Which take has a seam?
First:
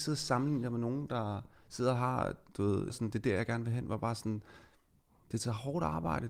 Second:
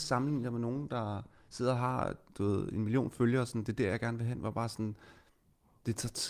first; 2 cuts; at 2.9 s, 5.2 s

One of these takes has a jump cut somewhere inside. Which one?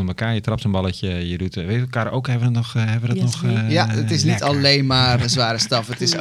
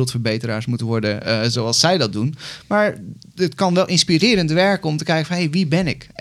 first; 1 cut; at 5.2 s

